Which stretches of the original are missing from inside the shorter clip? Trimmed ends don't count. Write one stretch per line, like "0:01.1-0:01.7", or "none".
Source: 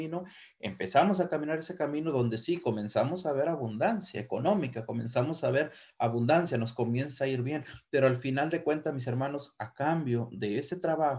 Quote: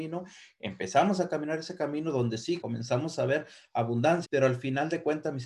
0:02.6-0:04.9
0:06.5-0:07.9